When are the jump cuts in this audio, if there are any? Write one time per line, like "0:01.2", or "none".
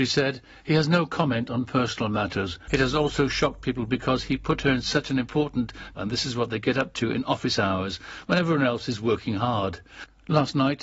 0:02.7
0:05.9

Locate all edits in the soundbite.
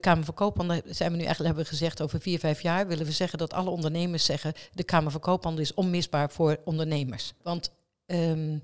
0:07.4

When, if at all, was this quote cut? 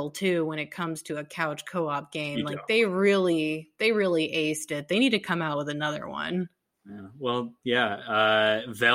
none

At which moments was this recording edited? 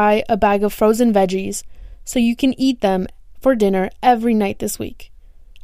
none

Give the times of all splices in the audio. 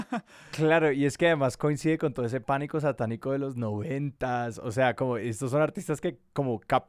none

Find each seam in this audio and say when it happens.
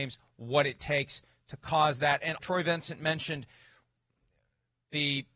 0:02.4

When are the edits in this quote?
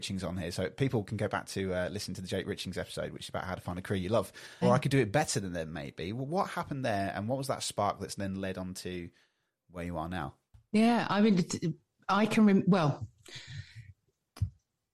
0:04.6

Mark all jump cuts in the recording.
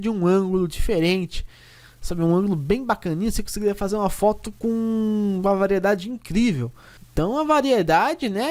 0:07.0

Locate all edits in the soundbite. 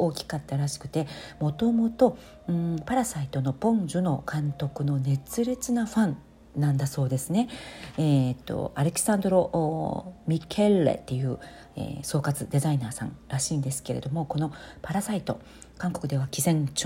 none

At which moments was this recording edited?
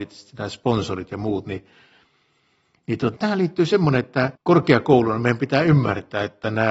0:03.2
0:04.4

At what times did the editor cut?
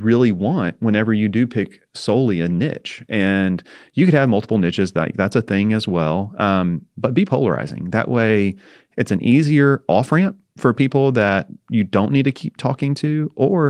none

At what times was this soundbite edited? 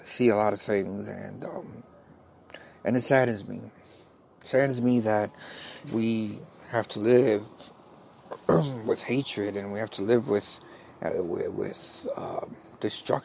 0:05.8

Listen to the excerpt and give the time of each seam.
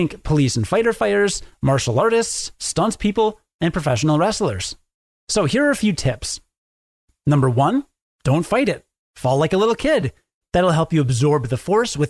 0:10.4

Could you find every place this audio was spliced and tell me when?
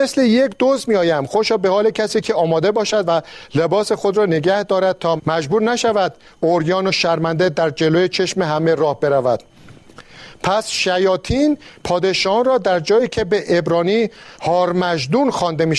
0:05.2
0:14.3

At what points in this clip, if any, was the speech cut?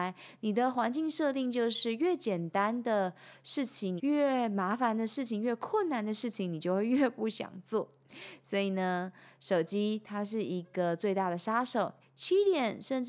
0:04.0
0:12.0

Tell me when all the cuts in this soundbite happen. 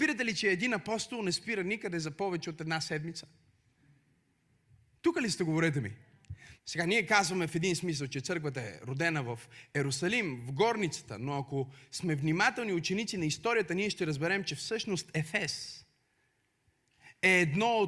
0:06.6

